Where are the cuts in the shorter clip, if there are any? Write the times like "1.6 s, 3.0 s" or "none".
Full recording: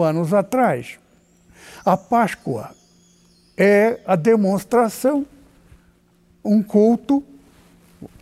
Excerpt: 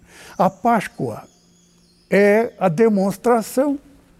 none